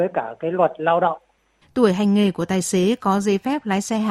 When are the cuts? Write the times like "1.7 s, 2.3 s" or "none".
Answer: 1.6 s